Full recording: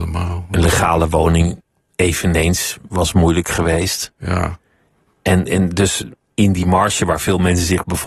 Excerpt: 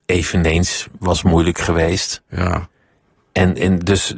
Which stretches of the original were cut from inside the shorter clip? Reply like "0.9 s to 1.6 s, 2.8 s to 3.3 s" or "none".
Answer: none